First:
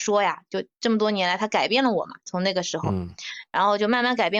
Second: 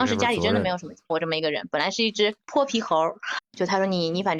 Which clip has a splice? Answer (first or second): second